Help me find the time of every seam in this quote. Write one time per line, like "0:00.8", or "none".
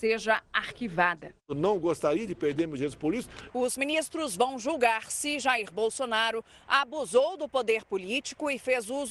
0:03.5